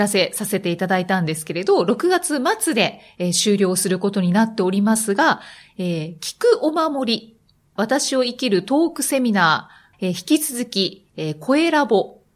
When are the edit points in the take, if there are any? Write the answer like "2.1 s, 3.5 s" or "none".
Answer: 7.8 s, 9.9 s